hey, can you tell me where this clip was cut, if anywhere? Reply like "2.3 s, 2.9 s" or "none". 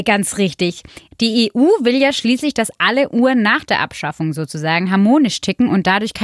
1.1 s